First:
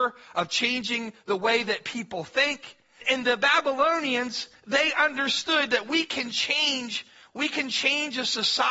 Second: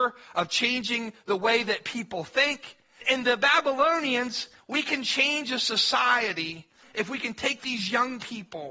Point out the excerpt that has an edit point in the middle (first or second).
second